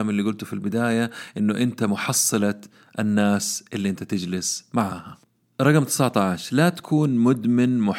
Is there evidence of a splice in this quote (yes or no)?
no